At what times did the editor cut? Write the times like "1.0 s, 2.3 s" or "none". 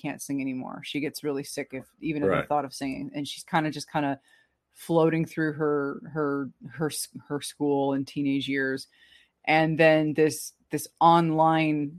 none